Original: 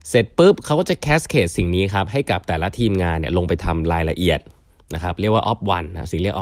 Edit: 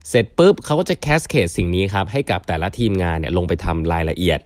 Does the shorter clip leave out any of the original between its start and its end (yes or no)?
no